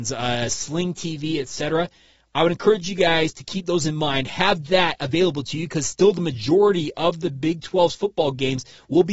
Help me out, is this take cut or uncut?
uncut